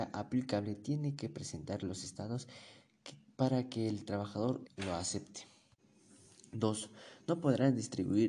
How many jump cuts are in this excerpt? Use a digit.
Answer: 1